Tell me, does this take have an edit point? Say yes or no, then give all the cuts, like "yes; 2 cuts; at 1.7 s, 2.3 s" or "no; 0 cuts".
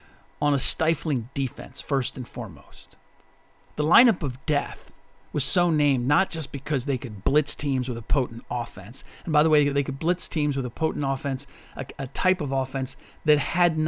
no; 0 cuts